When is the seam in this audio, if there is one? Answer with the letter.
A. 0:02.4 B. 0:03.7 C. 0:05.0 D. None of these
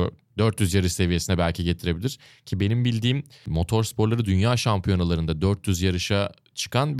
D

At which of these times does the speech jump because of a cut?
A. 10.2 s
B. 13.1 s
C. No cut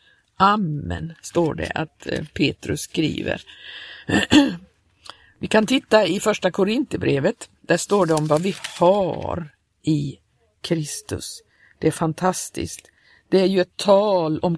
C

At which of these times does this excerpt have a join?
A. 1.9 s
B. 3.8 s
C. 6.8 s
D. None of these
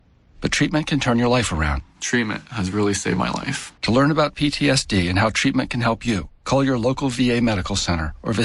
B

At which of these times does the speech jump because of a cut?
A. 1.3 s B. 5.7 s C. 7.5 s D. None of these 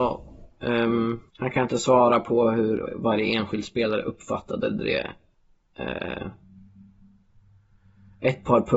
A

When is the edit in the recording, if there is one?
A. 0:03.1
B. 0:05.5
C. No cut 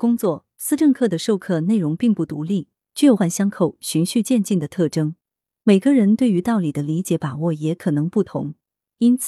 A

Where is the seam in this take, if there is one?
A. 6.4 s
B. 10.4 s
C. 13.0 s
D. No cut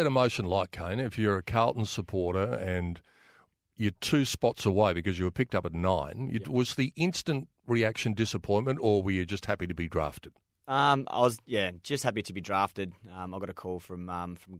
A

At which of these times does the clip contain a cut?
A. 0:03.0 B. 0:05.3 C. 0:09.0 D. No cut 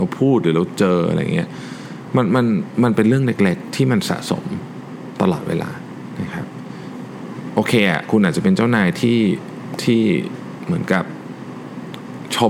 D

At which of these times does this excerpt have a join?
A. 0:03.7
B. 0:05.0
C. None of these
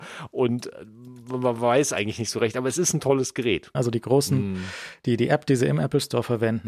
A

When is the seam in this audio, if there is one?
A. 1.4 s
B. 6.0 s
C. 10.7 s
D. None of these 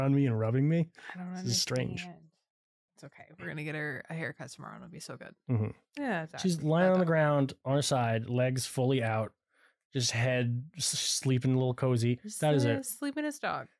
B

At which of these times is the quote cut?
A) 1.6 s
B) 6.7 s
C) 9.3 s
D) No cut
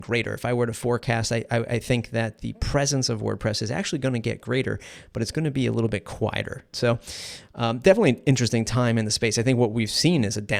B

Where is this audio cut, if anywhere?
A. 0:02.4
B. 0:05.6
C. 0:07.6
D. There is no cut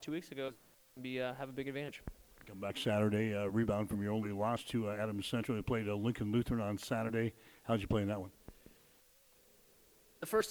D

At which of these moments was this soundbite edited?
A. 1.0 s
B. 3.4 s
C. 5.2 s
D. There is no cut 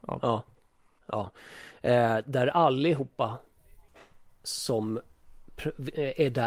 A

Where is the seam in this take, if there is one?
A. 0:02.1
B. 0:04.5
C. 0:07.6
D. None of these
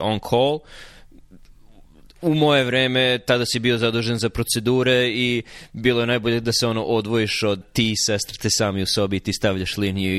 C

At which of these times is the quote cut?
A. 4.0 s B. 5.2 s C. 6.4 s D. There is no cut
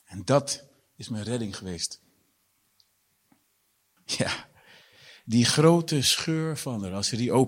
A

